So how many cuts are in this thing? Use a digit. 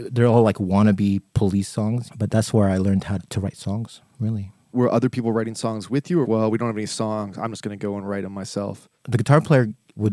1